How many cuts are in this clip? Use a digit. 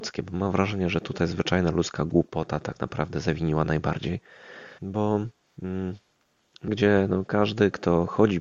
2